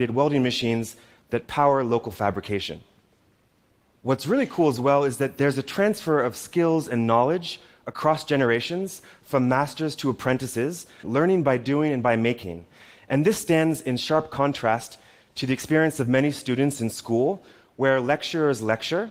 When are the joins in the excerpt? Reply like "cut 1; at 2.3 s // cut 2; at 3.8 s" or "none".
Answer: cut 1; at 11.0 s